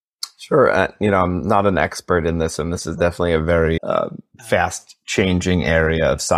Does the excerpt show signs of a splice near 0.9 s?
no; 1 cut; at 3.8 s

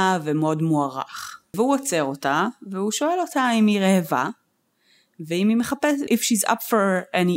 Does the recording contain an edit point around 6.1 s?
yes; 2 cuts; at 1.5 s, 6.1 s

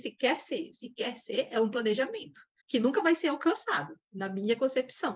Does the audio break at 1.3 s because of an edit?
no; 1 cut; at 2.6 s

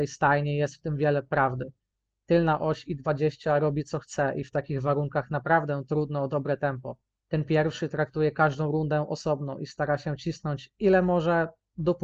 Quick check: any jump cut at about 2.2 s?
no; 1 cut; at 7.2 s

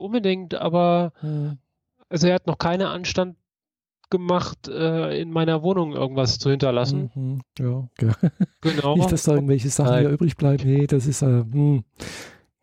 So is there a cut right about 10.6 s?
yes; 2 cuts; at 8.0 s, 10.6 s

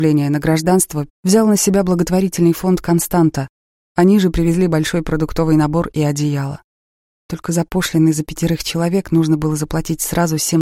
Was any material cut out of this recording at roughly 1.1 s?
yes; 1 cut; at 1.1 s

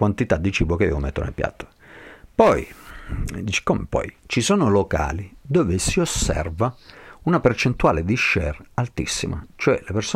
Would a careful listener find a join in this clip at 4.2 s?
yes; 1 cut; at 4.2 s

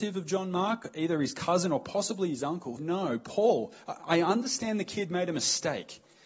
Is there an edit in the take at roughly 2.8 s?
yes; 1 cut; at 2.8 s

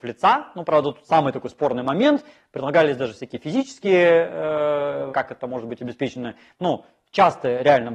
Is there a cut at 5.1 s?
yes; 1 cut; at 5.1 s

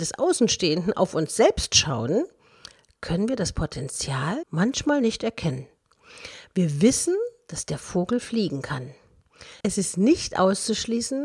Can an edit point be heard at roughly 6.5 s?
no; 2 cuts; at 4.4 s, 9.6 s

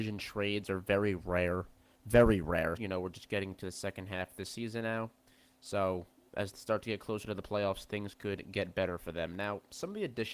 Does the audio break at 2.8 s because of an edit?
yes; 1 cut; at 2.8 s

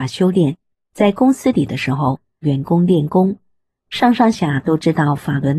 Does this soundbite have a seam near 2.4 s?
yes; 2 cuts; at 2.4 s, 4.3 s

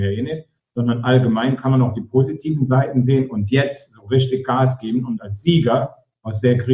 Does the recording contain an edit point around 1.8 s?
no; 0 cuts

